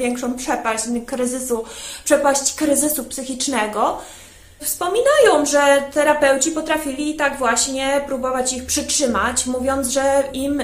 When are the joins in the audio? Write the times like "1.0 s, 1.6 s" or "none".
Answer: 4.6 s